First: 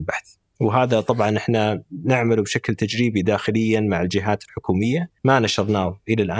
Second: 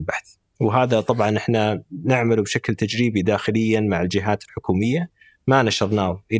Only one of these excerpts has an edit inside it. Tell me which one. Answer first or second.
first